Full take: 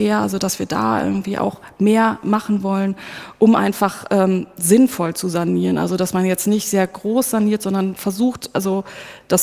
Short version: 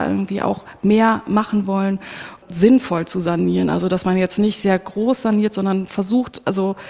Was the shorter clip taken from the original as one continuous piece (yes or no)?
no